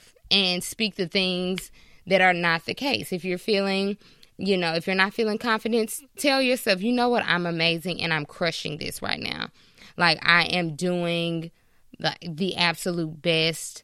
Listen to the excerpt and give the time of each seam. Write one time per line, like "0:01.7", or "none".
none